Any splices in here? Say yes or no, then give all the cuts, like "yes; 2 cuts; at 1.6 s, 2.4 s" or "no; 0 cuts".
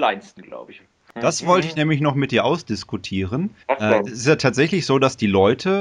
yes; 1 cut; at 3.6 s